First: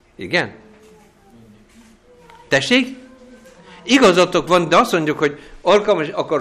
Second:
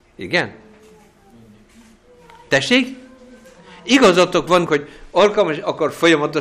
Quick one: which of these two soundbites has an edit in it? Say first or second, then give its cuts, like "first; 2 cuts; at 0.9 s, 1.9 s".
second; 1 cut; at 4.7 s